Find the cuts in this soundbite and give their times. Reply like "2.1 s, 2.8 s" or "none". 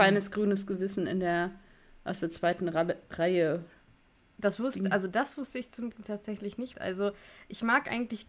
6.7 s